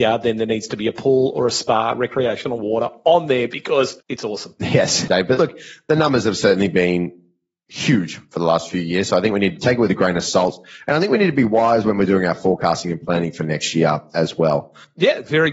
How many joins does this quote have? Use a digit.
2